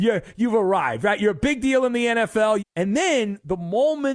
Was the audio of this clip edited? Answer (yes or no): yes